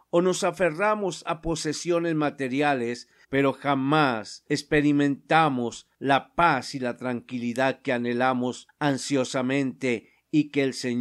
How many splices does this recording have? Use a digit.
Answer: 1